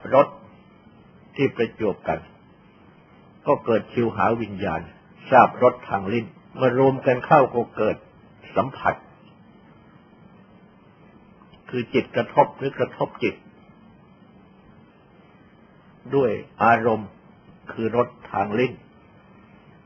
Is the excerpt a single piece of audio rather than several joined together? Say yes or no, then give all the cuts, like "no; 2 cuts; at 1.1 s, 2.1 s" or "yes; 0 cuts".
no; 2 cuts; at 6.5 s, 16.5 s